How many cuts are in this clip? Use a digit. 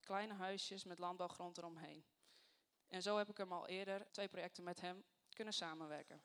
2